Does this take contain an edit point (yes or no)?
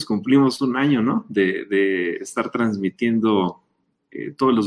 no